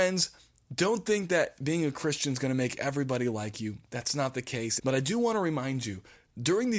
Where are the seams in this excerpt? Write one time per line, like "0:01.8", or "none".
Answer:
0:04.8